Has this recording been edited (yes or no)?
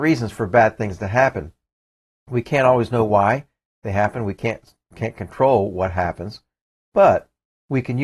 no